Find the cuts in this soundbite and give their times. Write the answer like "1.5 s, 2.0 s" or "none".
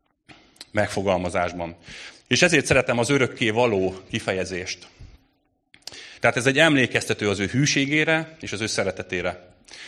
2.1 s, 6.2 s